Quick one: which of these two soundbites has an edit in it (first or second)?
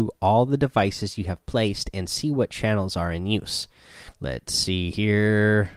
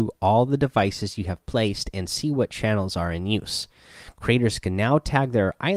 first